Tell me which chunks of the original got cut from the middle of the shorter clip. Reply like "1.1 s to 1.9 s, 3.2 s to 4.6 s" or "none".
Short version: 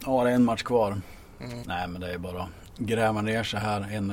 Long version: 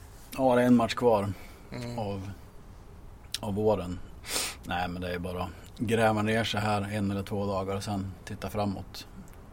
1.9 s to 4.6 s